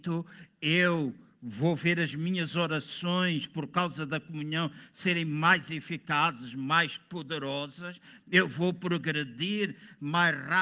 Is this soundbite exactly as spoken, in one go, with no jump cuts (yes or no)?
yes